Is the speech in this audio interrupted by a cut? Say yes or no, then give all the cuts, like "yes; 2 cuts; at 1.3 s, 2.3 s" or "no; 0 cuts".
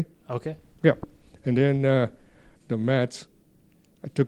yes; 1 cut; at 2.6 s